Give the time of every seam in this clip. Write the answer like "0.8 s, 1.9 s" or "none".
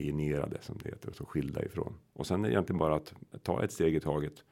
2.1 s